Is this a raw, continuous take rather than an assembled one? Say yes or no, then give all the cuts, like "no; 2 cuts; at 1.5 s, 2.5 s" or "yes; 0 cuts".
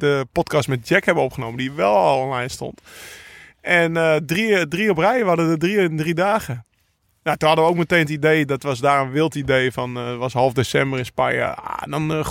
yes; 0 cuts